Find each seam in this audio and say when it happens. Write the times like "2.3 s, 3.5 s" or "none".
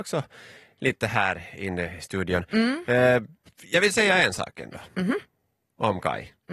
none

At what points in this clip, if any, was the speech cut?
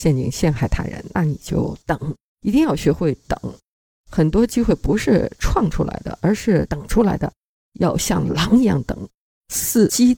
none

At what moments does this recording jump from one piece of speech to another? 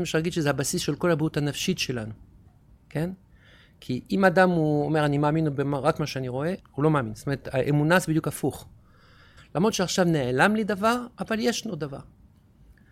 6.6 s, 9.4 s

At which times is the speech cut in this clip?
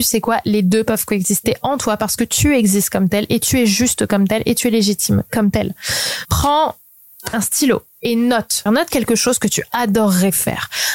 6.2 s, 8.7 s

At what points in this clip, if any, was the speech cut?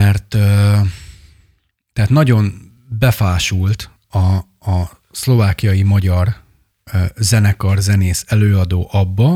none

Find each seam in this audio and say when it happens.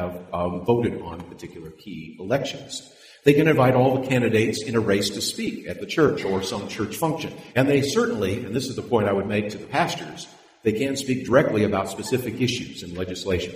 7.5 s

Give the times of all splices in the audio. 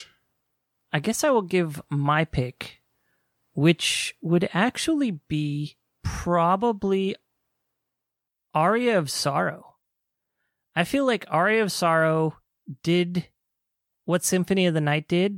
none

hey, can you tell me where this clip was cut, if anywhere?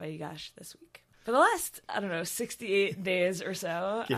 1.1 s

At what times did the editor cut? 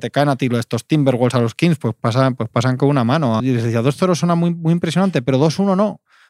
3.4 s

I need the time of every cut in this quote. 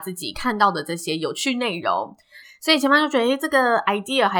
2.4 s

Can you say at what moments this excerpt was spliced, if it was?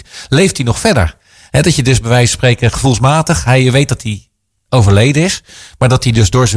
none

